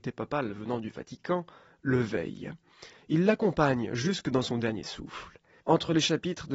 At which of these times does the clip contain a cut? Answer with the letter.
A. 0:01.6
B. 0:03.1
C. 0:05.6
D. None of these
C